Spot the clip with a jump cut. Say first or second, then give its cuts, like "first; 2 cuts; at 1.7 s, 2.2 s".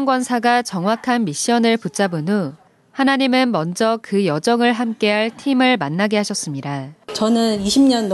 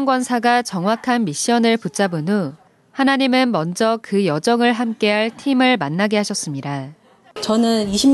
first; 1 cut; at 7.0 s